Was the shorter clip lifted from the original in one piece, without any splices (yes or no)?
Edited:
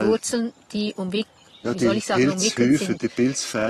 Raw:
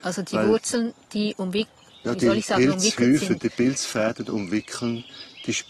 yes